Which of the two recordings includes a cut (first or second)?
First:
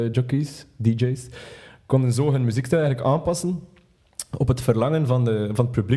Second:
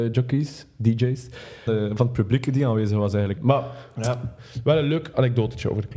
second